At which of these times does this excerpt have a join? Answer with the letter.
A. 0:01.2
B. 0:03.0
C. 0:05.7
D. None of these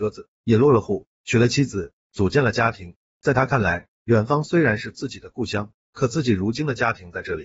B